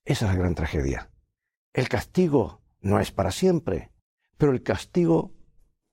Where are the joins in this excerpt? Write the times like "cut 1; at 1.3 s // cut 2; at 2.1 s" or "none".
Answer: cut 1; at 1.6 s